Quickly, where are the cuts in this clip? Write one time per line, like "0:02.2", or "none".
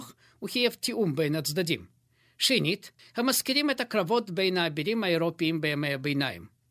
0:03.0